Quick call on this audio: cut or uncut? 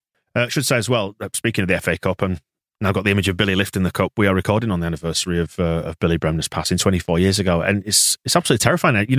uncut